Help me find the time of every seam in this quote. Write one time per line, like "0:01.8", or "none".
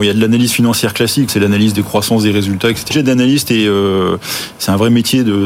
0:01.3
0:02.9